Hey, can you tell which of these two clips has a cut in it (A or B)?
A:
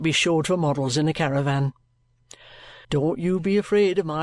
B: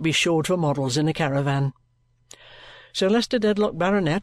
A